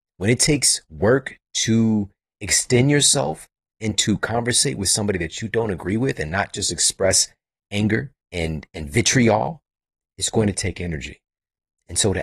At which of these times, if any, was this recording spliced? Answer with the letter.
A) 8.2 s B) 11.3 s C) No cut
A